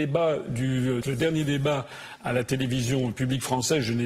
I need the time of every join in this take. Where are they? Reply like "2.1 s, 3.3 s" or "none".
1.0 s

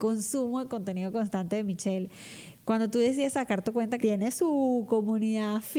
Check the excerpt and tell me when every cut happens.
4.0 s

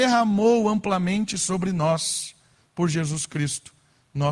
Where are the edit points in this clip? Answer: none

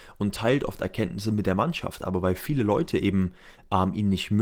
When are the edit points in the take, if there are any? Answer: none

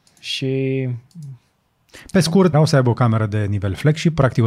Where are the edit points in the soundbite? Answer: 2.5 s

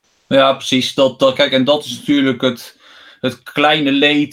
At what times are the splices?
none

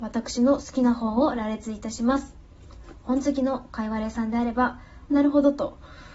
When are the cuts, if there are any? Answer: 5.1 s

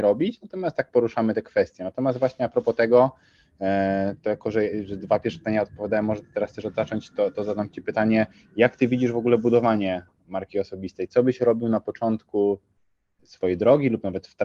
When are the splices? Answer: none

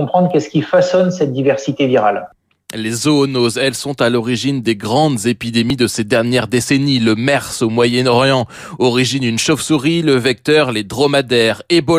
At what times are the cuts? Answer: none

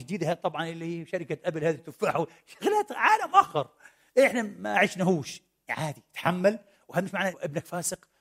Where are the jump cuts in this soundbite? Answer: 7.3 s

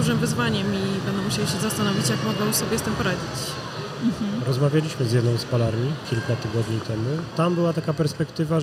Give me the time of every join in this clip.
none

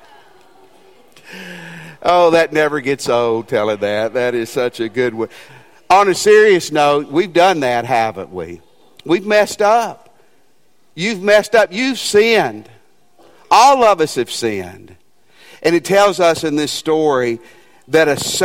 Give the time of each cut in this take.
5.5 s

